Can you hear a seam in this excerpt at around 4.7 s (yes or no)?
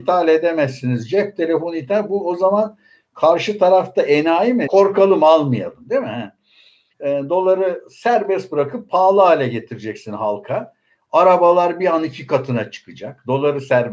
yes